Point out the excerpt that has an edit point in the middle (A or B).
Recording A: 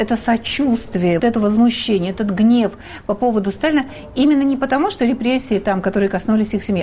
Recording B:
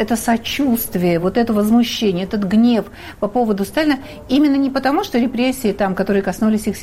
A